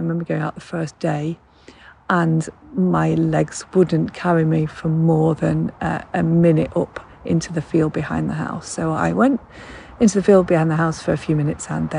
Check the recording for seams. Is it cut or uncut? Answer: uncut